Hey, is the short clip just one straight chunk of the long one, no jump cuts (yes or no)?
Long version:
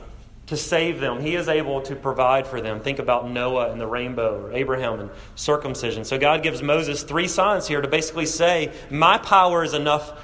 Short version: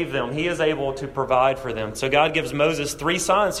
no